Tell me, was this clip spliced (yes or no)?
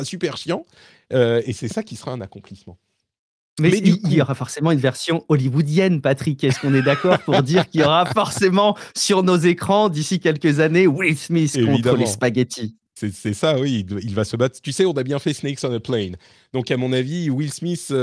no